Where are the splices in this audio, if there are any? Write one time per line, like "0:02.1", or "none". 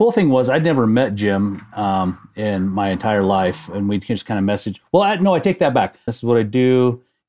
0:06.1